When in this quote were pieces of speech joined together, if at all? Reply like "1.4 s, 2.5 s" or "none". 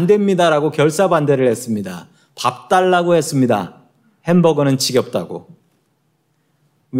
none